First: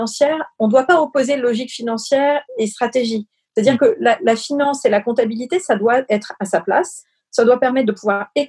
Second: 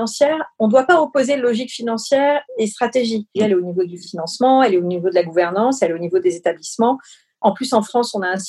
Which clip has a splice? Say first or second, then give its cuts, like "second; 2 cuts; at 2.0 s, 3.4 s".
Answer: second; 1 cut; at 3.3 s